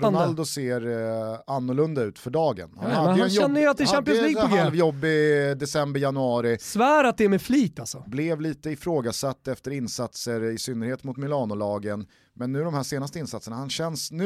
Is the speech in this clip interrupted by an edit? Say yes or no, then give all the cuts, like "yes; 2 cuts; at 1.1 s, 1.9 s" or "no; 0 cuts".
no; 0 cuts